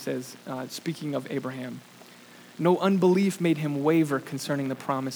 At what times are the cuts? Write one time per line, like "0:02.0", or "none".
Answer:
none

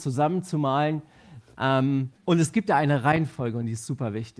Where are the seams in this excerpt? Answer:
0:02.1

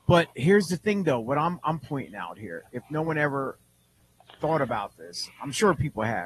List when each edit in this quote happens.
none

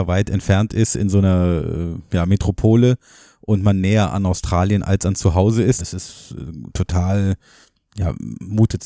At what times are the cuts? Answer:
0:05.8

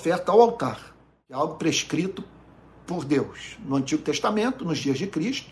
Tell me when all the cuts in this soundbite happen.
none

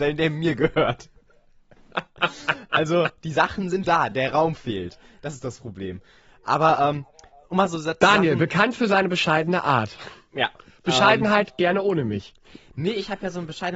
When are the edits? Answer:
0:03.8

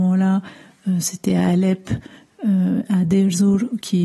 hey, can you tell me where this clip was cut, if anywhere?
none

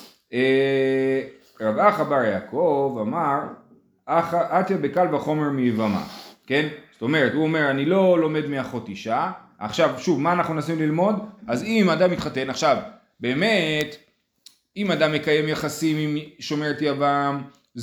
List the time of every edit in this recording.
0:11.4

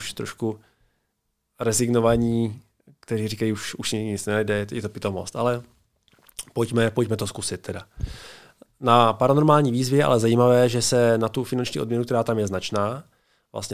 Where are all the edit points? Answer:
none

